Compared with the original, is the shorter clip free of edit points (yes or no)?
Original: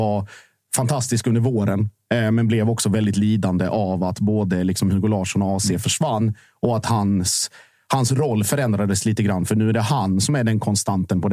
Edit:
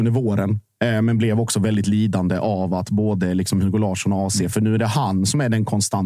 no